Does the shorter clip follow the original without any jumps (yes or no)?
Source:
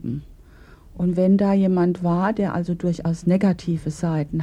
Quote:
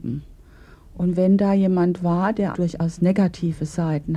no